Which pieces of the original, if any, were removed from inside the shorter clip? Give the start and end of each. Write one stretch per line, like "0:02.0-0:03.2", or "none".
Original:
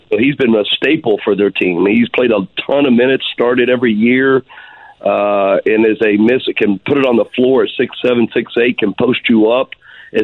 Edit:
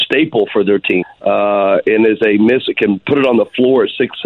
0:01.7-0:04.8